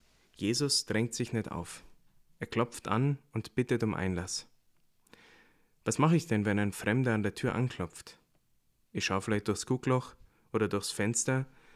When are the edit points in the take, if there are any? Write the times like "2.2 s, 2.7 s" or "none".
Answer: none